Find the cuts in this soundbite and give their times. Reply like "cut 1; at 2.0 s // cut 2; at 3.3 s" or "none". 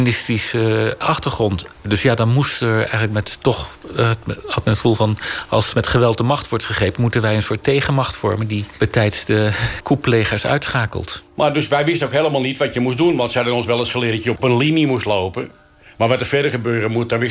none